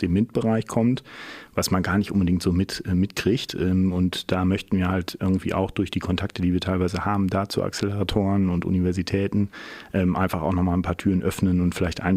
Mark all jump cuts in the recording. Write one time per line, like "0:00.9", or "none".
none